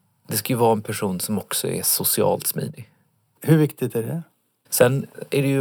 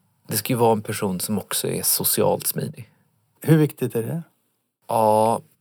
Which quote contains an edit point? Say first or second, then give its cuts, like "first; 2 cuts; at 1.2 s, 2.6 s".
first; 1 cut; at 4.7 s